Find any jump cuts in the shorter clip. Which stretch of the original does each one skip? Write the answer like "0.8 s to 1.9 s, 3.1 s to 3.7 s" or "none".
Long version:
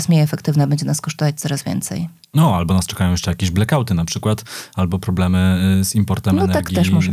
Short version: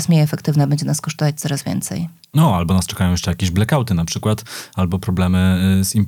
none